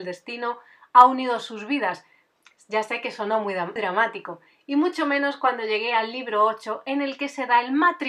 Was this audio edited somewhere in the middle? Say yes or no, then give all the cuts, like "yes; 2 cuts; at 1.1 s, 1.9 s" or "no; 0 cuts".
yes; 1 cut; at 3.8 s